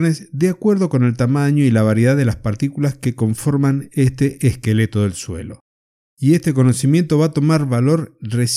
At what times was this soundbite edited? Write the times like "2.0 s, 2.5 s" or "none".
none